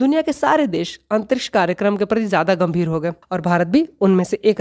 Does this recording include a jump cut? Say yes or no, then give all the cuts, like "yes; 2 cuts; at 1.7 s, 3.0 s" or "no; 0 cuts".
yes; 1 cut; at 3.2 s